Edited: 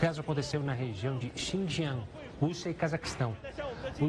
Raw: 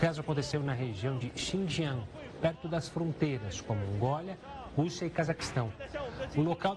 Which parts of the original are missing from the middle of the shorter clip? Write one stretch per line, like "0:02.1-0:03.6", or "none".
0:02.3-0:04.7

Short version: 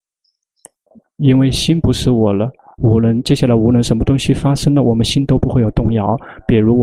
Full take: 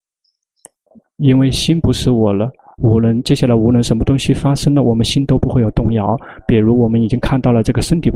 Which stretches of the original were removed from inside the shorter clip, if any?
none

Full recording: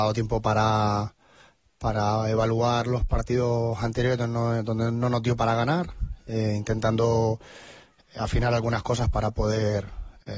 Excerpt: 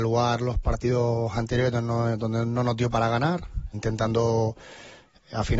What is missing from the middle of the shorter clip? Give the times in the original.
0:06.2-0:06.6

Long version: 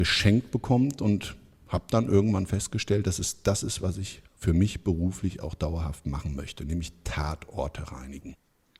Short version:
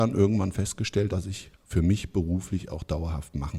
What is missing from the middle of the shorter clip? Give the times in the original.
0:03.0-0:03.8

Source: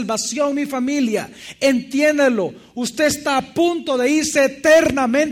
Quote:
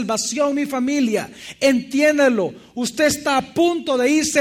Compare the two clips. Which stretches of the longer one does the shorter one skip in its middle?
none

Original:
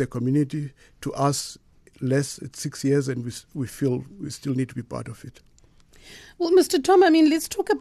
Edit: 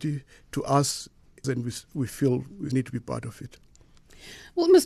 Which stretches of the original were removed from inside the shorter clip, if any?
0:01.9-0:03.0
0:04.3-0:04.5

